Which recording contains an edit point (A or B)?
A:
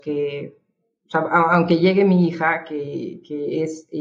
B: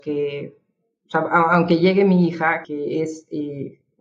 B